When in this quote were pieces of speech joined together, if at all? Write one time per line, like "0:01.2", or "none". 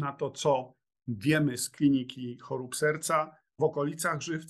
0:03.6